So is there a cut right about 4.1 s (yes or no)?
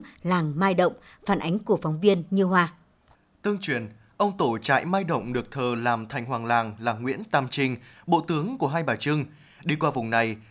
no